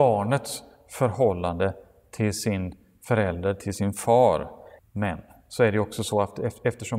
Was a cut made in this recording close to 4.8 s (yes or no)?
yes